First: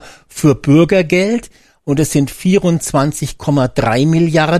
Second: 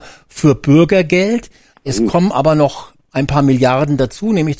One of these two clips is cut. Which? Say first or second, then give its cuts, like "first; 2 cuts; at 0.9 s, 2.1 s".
second; 1 cut; at 1.7 s